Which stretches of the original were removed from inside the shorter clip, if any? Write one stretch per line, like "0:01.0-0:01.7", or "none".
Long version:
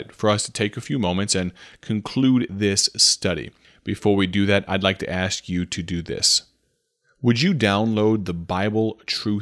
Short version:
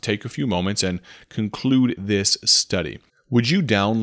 0:03.6-0:07.0